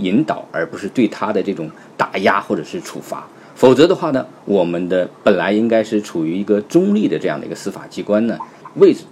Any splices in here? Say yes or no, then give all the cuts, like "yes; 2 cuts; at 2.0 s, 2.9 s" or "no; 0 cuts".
no; 0 cuts